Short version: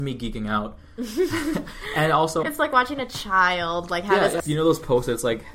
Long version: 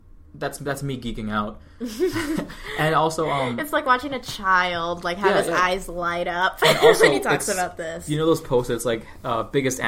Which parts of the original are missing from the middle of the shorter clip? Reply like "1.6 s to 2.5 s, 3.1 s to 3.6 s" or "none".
3.3 s to 3.6 s, 5.5 s to 8.0 s